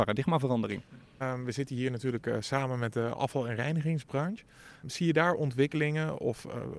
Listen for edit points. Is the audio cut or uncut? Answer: uncut